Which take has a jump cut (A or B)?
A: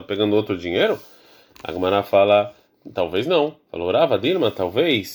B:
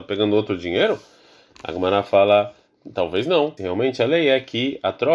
B